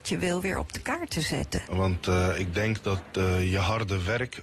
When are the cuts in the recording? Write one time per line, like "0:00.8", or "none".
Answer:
0:01.7

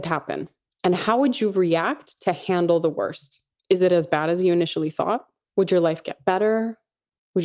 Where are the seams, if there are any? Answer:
0:05.4

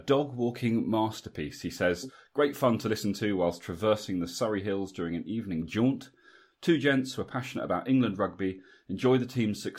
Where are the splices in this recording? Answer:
none

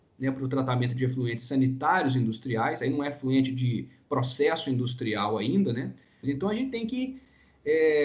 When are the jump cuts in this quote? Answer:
0:06.2

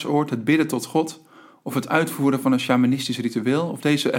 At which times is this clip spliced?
none

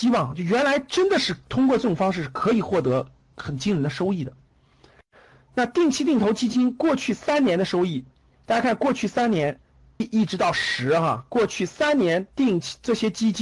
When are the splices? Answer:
0:10.0

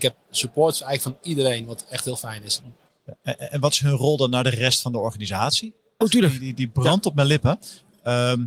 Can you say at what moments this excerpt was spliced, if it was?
0:06.0

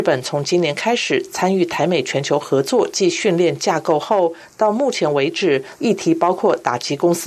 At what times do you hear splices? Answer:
0:05.8

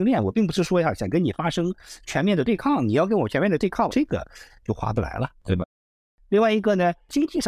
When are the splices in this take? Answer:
0:03.9

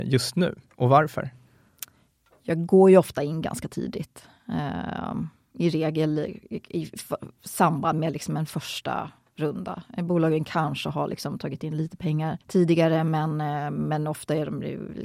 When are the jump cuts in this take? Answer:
0:12.4

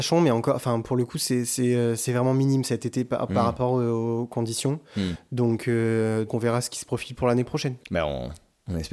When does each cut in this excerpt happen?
0:06.3

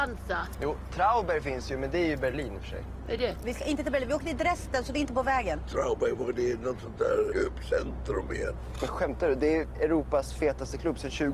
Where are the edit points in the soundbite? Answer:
0:07.3

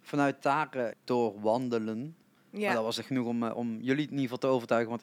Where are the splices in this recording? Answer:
0:00.9
0:02.4

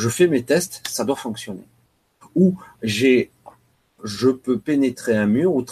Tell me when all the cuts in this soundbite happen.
0:02.2
0:04.0

